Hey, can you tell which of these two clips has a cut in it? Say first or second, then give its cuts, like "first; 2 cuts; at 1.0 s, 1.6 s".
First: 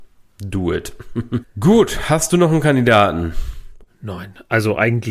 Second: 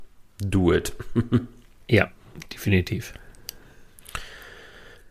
first; 2 cuts; at 1.4 s, 3.9 s